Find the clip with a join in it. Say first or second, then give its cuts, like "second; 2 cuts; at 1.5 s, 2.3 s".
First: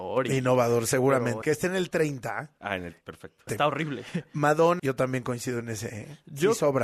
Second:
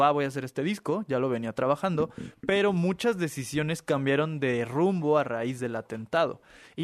first; 3 cuts; at 1.4 s, 3.5 s, 4.8 s